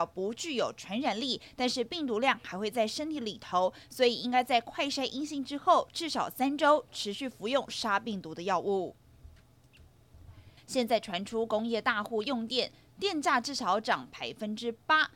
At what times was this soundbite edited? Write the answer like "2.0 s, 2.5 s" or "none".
10.6 s